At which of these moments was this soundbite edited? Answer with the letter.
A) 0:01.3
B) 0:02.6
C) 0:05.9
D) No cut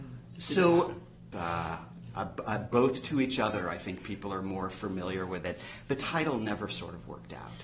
A